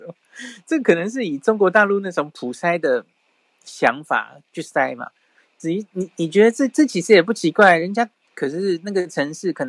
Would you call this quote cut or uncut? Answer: uncut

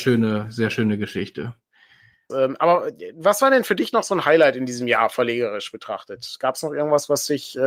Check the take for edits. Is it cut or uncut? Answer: cut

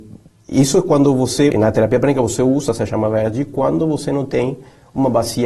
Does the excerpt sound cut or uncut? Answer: cut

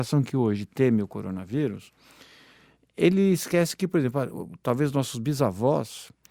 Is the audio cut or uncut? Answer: uncut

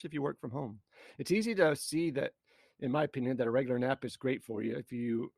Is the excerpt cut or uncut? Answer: uncut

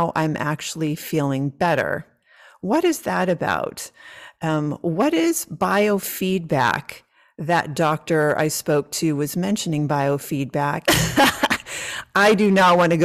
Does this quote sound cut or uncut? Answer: cut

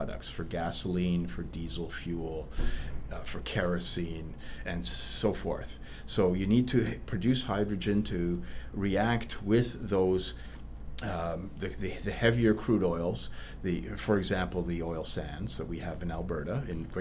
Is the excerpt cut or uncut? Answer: cut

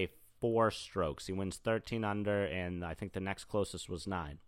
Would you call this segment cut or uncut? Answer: uncut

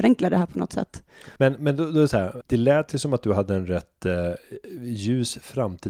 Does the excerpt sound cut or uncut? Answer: cut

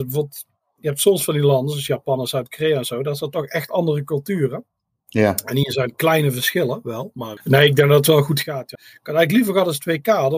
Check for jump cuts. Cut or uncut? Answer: cut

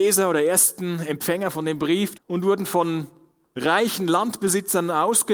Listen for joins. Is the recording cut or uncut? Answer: cut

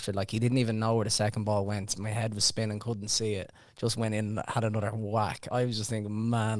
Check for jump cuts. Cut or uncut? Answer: uncut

